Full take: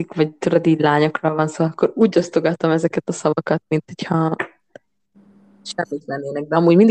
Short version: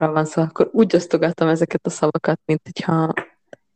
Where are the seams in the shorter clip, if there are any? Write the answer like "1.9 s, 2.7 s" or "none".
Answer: none